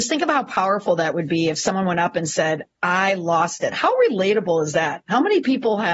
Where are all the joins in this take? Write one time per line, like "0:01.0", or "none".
none